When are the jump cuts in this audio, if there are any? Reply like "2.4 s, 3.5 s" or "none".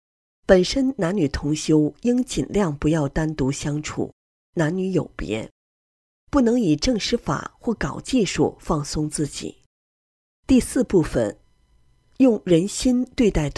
10.3 s